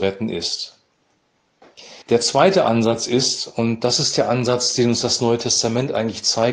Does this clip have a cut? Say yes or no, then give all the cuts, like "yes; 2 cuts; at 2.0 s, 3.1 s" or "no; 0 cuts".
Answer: yes; 1 cut; at 2.0 s